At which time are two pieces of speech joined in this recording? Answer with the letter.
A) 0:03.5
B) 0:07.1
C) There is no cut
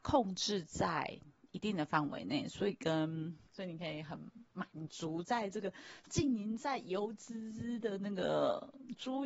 A